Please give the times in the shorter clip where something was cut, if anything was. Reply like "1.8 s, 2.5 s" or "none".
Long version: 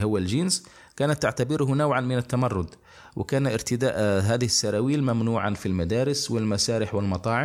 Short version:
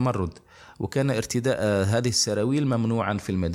none